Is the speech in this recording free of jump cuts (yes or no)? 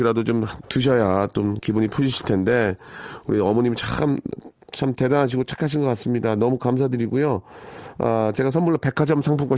yes